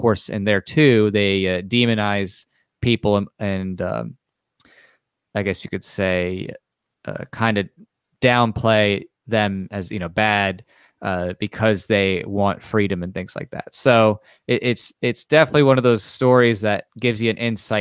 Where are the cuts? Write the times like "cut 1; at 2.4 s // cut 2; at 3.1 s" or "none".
cut 1; at 16.9 s